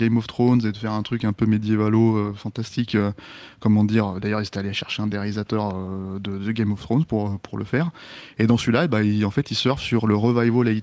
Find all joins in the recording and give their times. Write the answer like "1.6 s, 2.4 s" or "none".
none